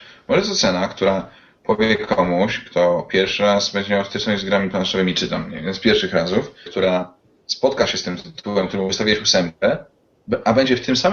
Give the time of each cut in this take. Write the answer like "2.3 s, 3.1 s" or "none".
6.7 s